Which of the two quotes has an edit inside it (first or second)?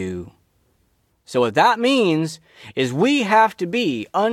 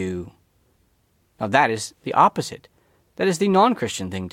first